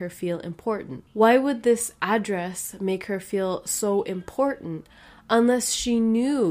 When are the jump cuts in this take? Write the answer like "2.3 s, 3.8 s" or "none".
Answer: 1.1 s